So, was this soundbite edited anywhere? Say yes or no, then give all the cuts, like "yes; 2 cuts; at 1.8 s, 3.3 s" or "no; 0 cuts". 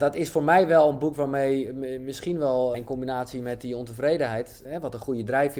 yes; 2 cuts; at 2.7 s, 4.6 s